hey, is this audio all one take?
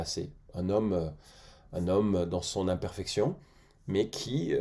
yes; 0 cuts

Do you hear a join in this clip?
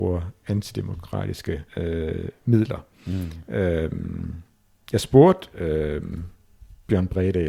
yes; 1 cut; at 1.7 s

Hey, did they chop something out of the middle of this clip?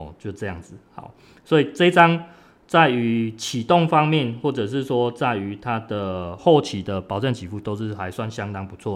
yes; 1 cut; at 6.4 s

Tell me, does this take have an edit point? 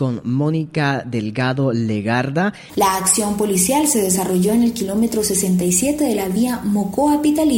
yes; 1 cut; at 2.7 s

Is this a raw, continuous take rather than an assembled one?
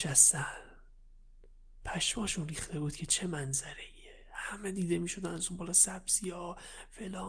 yes; 0 cuts

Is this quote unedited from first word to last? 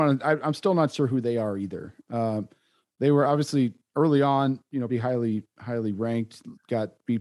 no; 1 cut; at 4.9 s

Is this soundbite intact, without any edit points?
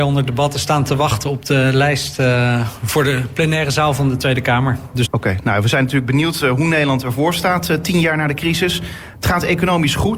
no; 1 cut; at 5.0 s

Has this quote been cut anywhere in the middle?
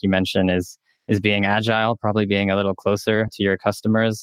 no; 0 cuts

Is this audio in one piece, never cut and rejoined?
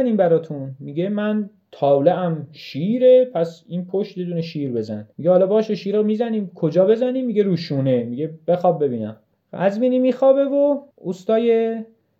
no; 2 cuts; at 5.1 s, 10.9 s

